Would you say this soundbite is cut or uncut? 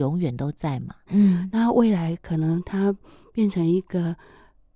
cut